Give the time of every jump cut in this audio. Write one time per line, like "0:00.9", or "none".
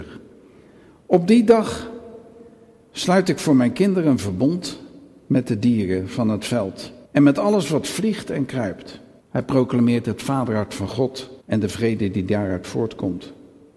0:07.1
0:09.2
0:11.4